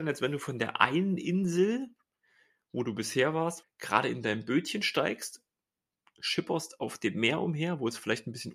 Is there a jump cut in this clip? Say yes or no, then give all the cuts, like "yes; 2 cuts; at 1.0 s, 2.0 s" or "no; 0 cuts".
yes; 1 cut; at 3.6 s